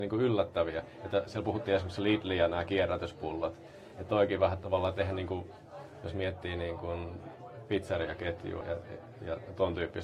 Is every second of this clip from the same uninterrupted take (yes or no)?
no